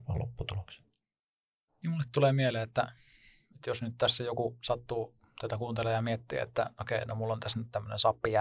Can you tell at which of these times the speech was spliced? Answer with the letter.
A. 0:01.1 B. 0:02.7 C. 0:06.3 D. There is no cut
D